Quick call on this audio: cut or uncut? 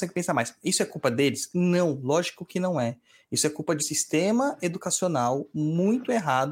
cut